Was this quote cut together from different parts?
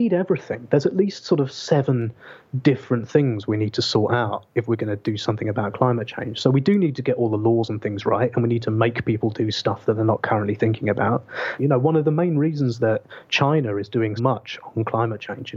yes; 2 cuts; at 11.6 s, 14.2 s

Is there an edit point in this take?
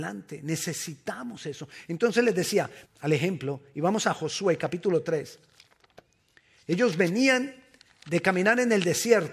yes; 1 cut; at 2.9 s

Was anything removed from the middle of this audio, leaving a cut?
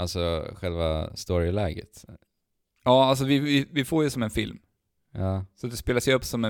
no; 0 cuts

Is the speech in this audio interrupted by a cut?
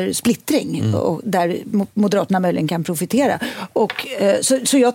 no; 0 cuts

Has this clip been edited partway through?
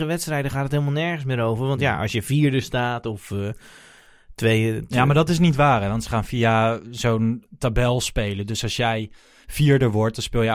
no; 0 cuts

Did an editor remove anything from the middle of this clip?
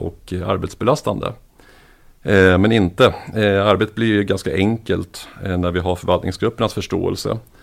no; 0 cuts

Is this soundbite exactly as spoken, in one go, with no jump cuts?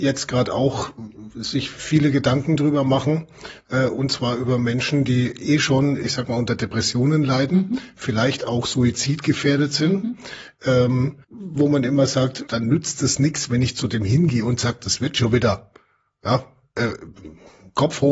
no; 2 cuts; at 11.2 s, 12.5 s

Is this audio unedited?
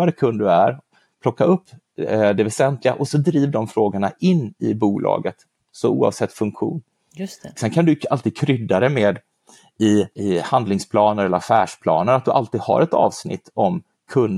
no; 2 cuts; at 7.6 s, 10.1 s

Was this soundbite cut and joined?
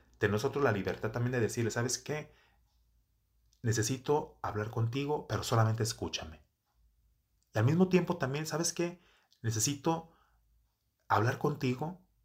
no; 0 cuts

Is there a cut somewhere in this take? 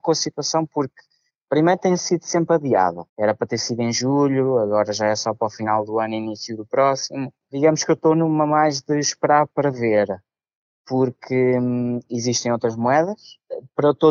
yes; 1 cut; at 3.1 s

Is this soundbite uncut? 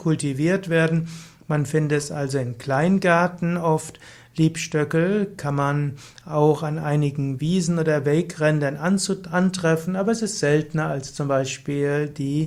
yes; 0 cuts

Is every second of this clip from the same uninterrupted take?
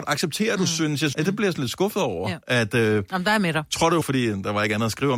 no; 2 cuts; at 1.1 s, 4.0 s

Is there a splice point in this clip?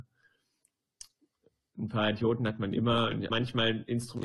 yes; 1 cut; at 3.3 s

